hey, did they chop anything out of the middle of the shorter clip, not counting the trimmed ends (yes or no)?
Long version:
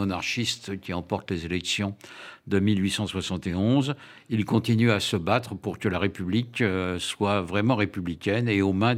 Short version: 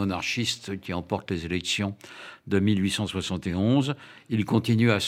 no